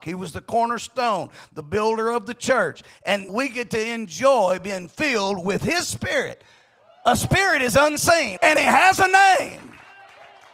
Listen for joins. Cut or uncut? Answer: cut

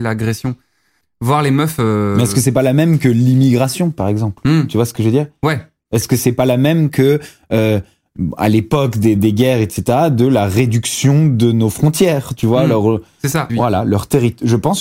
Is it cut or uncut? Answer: cut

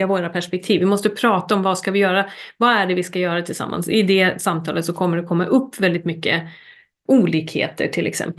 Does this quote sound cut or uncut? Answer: cut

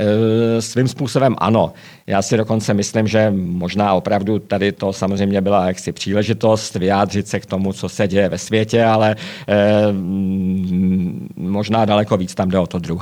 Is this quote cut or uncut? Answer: uncut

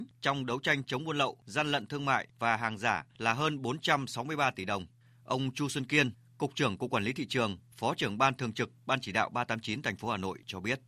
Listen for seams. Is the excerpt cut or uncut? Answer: uncut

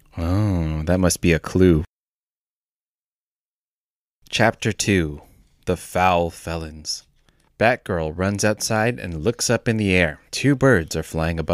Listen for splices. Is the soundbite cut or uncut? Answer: cut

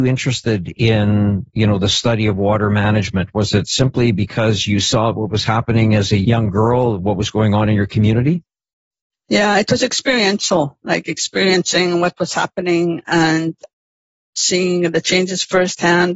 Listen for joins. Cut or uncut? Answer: uncut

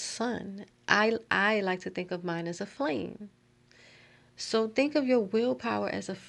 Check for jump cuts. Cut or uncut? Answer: uncut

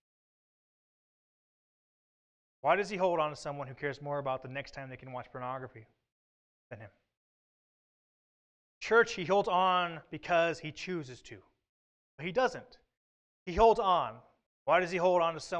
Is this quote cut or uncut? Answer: cut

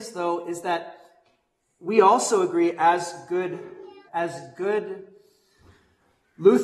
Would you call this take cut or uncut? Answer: cut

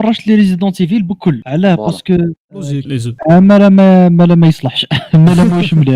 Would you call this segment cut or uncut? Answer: cut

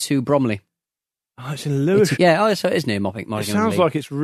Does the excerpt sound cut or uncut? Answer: cut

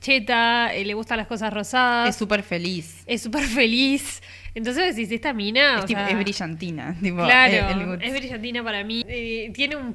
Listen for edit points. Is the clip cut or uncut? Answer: cut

